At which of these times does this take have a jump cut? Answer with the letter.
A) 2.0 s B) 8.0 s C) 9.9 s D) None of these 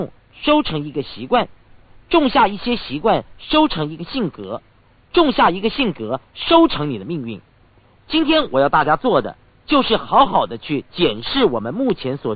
D